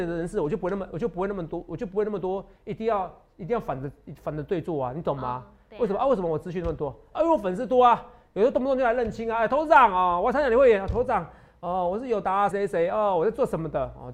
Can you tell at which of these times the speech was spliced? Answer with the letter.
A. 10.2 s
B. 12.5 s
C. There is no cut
B